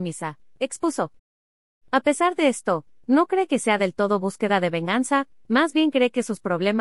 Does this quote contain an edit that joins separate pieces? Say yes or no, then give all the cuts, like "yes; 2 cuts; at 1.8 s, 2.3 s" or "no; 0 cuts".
no; 0 cuts